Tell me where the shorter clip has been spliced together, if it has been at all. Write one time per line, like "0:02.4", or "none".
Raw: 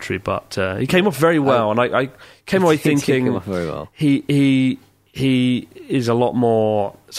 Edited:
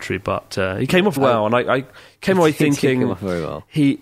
0:01.2